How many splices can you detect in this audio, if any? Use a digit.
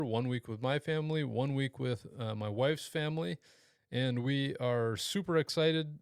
0